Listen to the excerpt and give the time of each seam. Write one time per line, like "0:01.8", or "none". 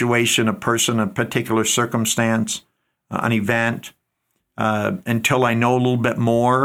none